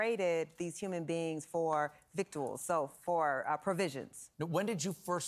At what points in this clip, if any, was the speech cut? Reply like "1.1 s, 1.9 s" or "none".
4.3 s